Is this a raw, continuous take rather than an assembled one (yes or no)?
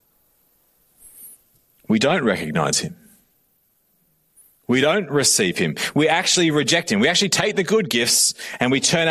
yes